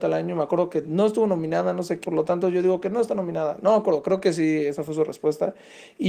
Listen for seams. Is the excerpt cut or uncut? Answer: cut